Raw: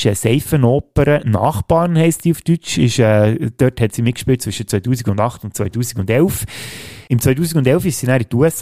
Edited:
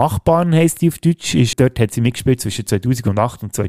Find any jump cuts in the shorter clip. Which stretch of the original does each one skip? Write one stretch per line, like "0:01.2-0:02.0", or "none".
0:03.0-0:03.5